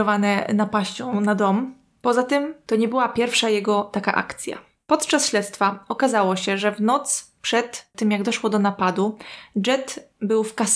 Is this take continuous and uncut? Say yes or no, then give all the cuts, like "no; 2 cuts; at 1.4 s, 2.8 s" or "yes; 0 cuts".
yes; 0 cuts